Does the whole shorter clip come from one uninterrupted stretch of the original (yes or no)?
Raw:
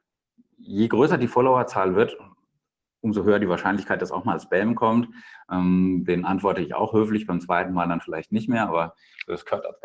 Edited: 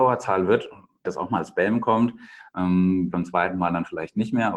no